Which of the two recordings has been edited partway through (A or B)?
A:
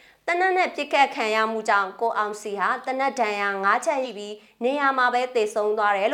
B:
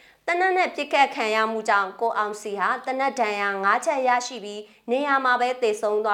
A